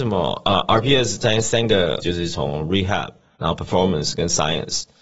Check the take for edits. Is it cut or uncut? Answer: cut